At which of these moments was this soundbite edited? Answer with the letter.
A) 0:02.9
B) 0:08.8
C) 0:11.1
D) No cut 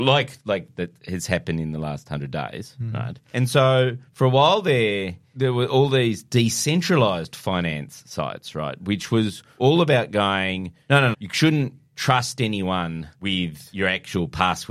C